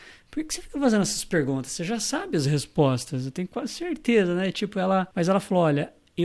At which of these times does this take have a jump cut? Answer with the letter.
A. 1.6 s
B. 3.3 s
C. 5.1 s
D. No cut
C